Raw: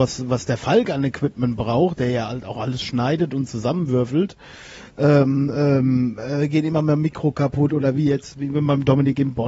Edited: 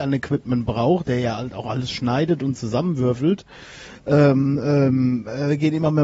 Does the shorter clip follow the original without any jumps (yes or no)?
yes